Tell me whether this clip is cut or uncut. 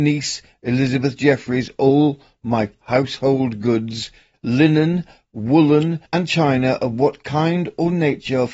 cut